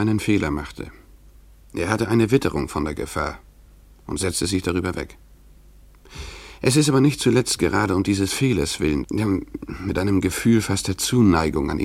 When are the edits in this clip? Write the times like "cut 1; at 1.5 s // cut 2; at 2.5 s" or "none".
cut 1; at 9.0 s